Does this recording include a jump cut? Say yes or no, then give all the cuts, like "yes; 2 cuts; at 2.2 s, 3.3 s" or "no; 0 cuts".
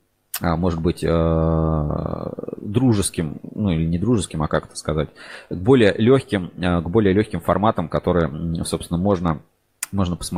no; 0 cuts